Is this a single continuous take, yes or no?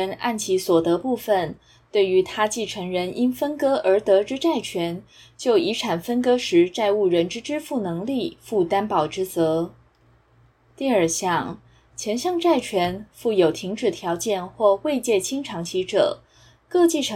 yes